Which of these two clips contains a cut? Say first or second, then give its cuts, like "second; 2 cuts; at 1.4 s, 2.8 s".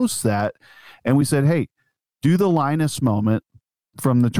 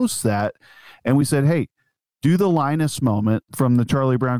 second; 1 cut; at 3.5 s